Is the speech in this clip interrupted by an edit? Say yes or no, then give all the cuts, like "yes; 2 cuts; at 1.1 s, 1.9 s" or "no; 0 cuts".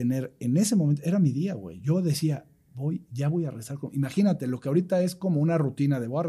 no; 0 cuts